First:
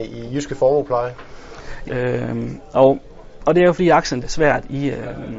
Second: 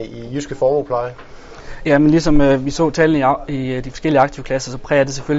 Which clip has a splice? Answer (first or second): first